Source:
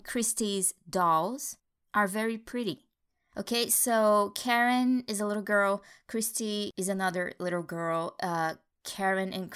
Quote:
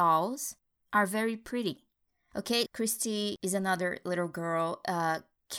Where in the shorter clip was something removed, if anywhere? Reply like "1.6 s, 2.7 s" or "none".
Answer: 2.7 s